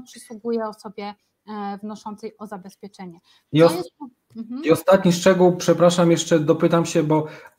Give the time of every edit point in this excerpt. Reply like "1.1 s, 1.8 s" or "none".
none